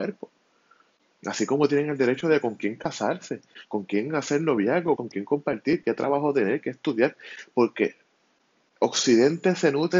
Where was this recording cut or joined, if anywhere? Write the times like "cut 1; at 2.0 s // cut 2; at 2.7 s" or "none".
cut 1; at 5.0 s